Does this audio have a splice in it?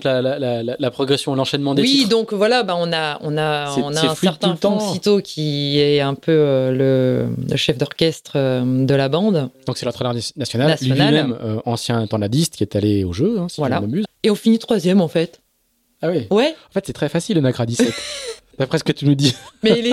yes; 2 cuts; at 14.0 s, 16.9 s

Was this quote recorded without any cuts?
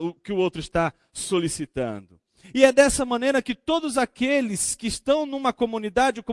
no; 1 cut; at 2.4 s

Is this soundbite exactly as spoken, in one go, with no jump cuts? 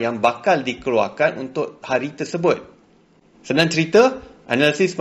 no; 1 cut; at 3.3 s

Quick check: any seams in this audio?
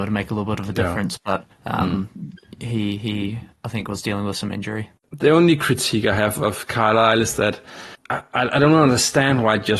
no; 0 cuts

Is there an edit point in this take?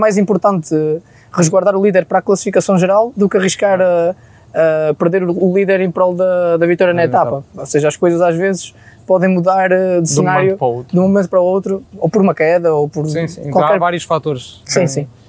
no; 0 cuts

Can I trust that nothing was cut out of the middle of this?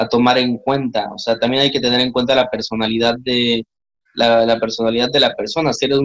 yes; 0 cuts

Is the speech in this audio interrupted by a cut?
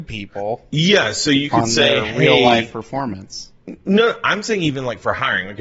no; 0 cuts

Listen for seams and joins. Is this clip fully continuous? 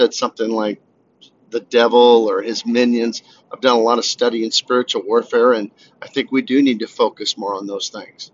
yes; 0 cuts

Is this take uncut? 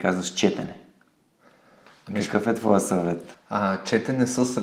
no; 1 cut; at 3.3 s

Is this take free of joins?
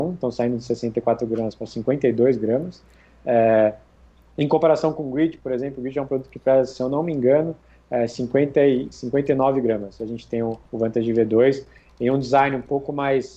yes; 0 cuts

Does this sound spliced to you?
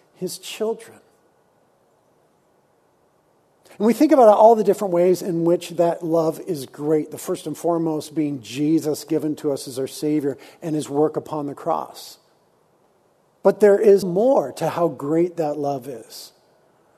yes; 1 cut; at 14.0 s

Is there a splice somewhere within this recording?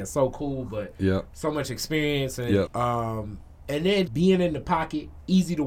yes; 2 cuts; at 2.7 s, 4.1 s

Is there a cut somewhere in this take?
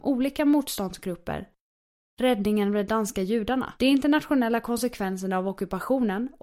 yes; 2 cuts; at 2.1 s, 3.8 s

